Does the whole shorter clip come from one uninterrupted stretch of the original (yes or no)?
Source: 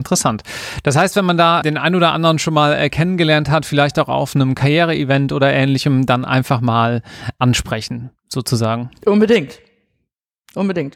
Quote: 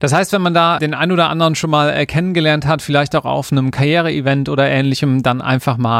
yes